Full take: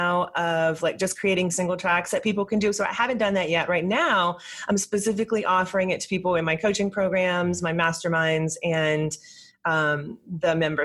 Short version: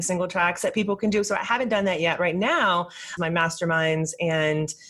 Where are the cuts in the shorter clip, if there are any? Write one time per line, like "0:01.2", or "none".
0:03.2

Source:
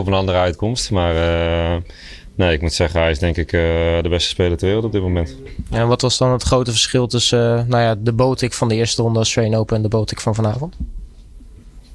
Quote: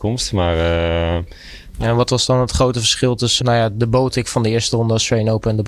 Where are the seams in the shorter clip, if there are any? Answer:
0:01.7
0:03.4

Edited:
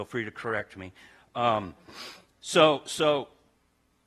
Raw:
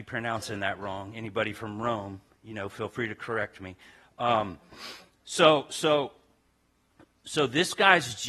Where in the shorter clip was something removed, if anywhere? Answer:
none

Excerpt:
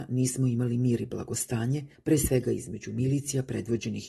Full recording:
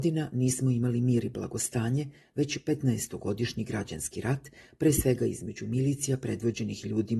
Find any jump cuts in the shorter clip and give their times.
0:01.9

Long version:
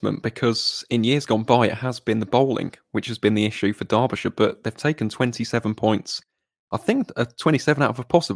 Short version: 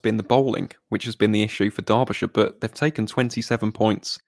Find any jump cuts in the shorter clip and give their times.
none

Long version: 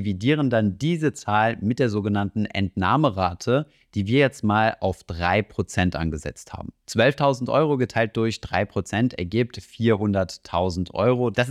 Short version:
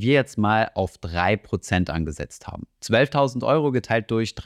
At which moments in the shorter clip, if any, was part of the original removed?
none

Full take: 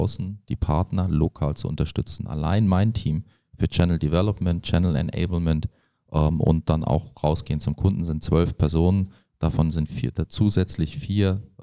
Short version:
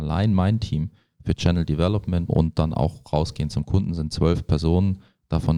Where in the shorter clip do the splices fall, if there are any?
0:02.3

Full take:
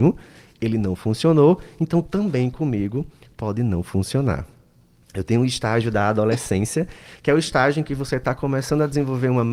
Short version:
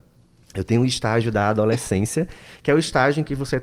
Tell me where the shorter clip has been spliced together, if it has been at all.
none

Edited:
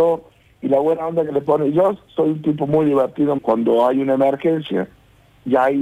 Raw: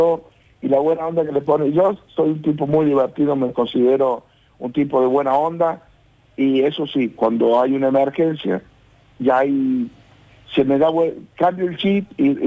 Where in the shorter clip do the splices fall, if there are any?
0:03.4

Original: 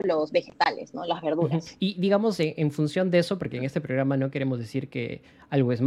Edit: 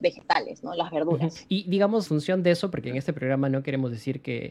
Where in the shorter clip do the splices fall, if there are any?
0:02.1

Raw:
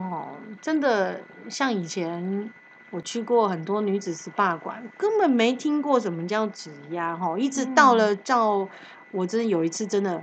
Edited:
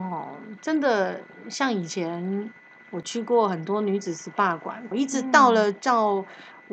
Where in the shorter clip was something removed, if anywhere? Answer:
0:04.9

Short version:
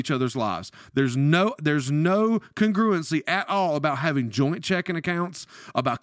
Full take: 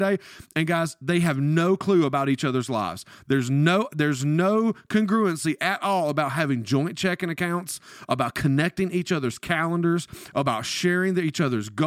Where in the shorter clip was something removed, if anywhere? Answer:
none

